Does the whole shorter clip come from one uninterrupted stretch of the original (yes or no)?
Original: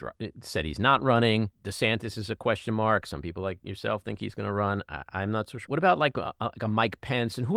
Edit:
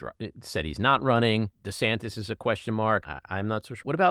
no